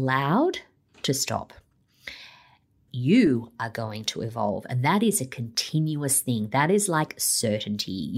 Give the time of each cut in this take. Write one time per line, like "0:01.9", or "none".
0:02.9